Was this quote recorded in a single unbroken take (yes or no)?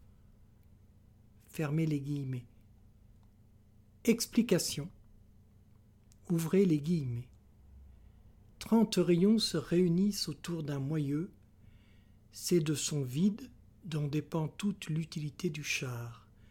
no